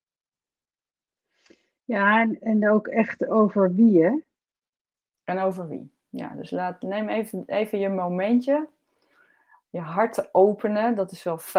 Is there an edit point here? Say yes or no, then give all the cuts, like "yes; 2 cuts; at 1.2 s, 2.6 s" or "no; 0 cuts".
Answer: no; 0 cuts